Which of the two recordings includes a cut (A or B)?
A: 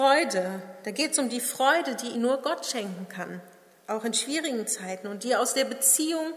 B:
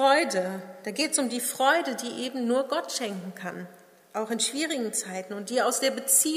A